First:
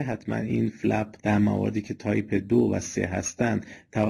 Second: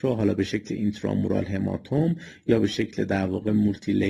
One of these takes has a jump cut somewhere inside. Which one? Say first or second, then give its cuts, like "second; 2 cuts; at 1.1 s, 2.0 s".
first; 1 cut; at 1.2 s